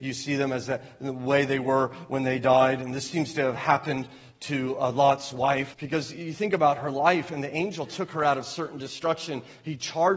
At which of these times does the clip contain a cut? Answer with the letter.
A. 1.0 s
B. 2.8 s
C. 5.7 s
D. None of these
C